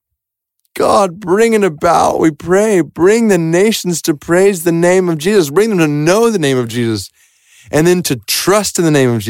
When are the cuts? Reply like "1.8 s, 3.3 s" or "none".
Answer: none